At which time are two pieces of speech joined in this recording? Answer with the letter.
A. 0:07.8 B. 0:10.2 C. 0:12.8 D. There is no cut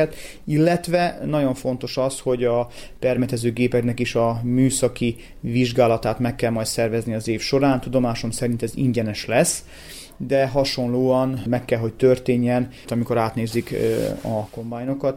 C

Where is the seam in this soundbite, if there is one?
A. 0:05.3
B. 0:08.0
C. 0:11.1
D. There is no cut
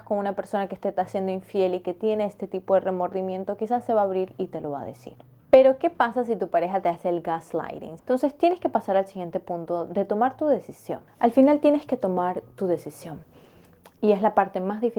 B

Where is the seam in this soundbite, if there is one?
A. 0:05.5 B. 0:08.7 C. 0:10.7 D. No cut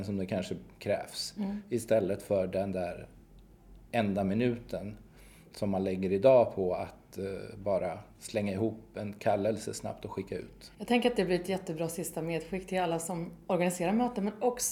C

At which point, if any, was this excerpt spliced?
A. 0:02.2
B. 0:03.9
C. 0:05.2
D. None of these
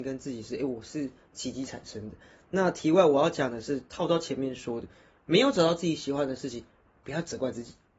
D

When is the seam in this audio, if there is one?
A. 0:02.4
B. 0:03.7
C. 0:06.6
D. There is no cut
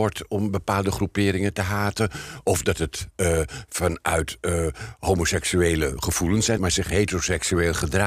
C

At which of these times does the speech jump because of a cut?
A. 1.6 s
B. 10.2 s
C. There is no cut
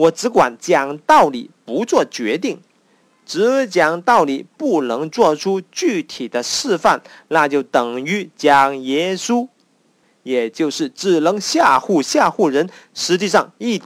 C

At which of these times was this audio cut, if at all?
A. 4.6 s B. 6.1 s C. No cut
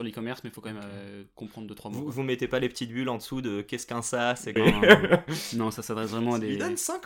A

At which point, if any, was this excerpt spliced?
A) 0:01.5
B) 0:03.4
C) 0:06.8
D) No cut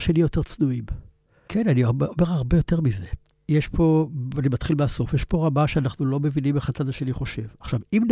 A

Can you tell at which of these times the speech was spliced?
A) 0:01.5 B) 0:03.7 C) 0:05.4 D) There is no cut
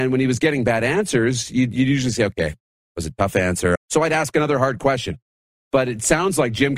B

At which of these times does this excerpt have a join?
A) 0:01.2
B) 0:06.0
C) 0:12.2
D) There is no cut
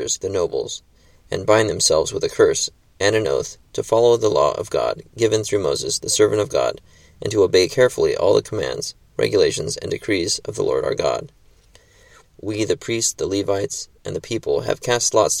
C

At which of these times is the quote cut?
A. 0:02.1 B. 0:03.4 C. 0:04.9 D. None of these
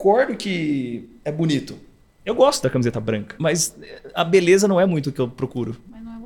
B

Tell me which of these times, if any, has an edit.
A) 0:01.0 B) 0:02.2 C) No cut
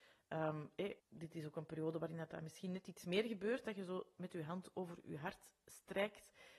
A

